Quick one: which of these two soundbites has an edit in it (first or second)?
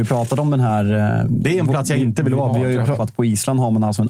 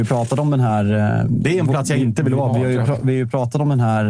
first